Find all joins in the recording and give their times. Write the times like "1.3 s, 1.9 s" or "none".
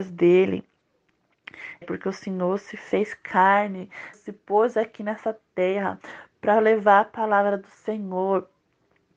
1.8 s, 4.1 s